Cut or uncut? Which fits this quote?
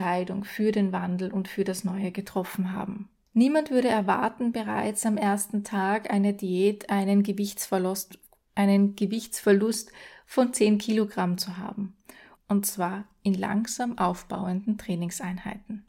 cut